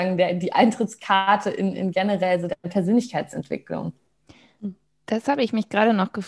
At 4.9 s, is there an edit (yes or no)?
no